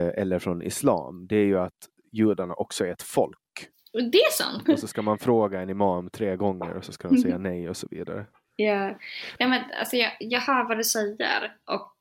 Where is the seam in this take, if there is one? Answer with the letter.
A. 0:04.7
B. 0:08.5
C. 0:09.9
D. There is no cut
A